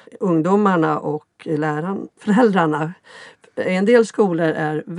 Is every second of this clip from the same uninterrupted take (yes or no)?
no